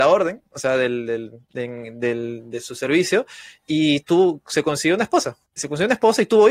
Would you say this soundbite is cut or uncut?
cut